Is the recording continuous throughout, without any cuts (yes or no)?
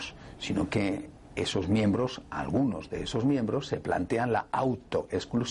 yes